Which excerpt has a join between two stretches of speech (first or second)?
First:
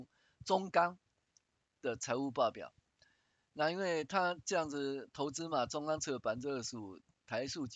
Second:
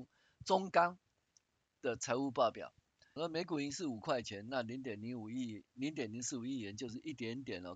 second